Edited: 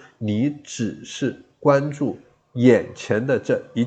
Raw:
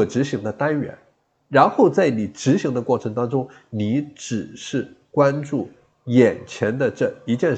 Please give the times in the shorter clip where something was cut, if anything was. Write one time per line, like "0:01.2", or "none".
none